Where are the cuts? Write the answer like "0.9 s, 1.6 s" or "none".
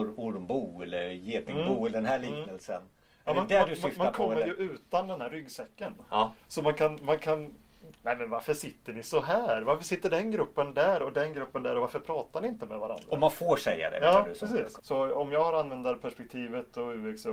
8.0 s, 14.8 s